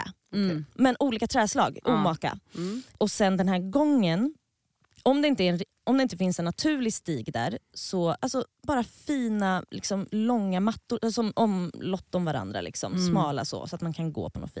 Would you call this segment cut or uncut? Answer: uncut